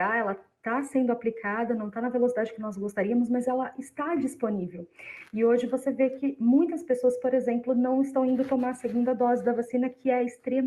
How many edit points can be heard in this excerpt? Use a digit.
0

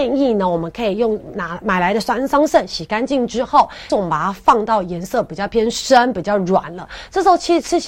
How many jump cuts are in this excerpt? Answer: 1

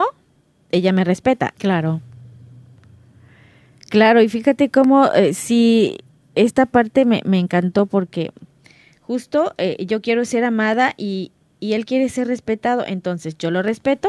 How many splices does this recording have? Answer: 1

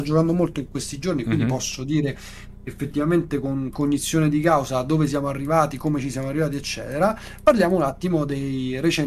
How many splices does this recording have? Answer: 0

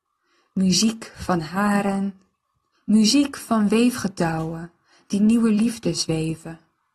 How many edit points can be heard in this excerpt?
1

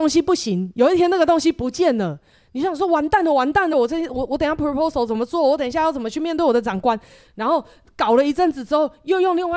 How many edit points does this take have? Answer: 1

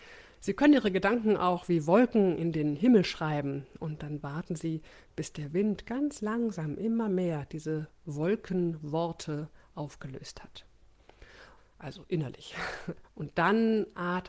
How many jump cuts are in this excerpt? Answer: 2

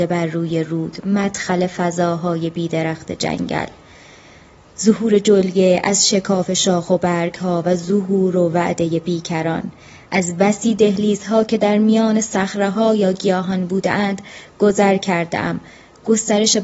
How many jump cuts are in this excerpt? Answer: 0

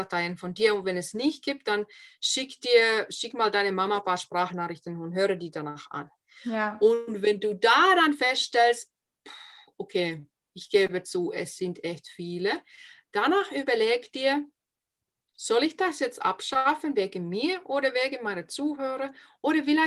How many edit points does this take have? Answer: 0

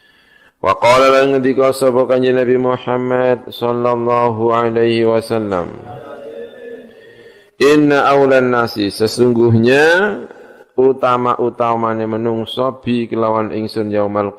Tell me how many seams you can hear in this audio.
0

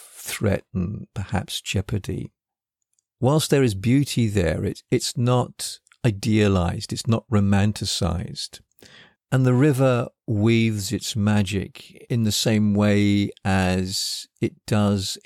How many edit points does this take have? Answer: 1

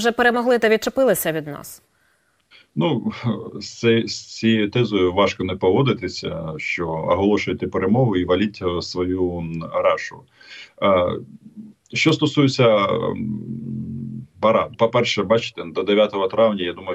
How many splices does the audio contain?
1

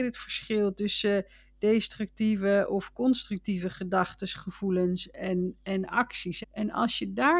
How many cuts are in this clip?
1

